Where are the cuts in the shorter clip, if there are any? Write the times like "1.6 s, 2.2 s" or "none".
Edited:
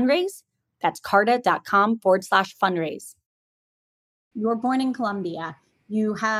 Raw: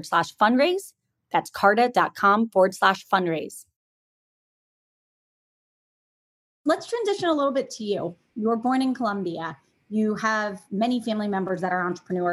4.3 s